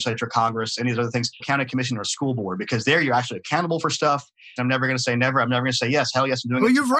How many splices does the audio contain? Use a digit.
2